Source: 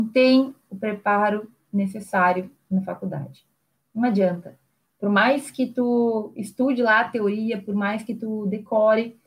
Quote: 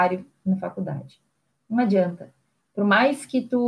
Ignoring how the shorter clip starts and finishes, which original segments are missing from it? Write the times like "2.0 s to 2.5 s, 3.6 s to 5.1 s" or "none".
none